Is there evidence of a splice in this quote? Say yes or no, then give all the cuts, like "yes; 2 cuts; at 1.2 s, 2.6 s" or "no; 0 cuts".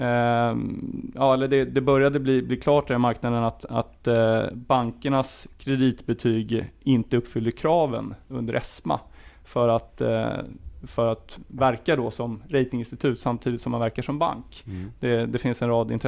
no; 0 cuts